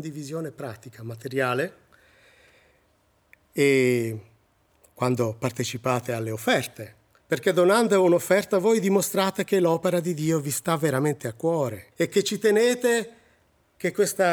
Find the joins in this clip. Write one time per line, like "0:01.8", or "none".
0:07.2
0:11.9